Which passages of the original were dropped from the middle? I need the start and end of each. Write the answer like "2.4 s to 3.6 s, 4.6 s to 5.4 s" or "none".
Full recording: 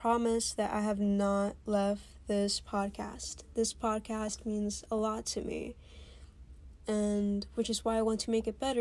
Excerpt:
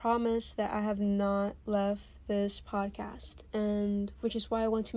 3.4 s to 6.8 s